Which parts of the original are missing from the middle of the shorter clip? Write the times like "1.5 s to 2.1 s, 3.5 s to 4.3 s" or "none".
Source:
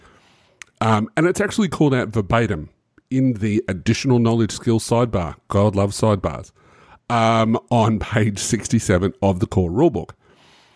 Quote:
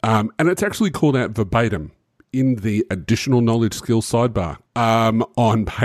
5.4 s to 7.0 s